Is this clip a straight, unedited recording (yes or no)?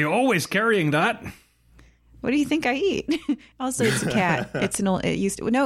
yes